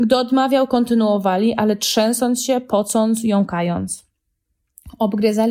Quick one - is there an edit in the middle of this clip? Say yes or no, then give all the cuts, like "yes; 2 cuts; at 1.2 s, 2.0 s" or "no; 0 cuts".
no; 0 cuts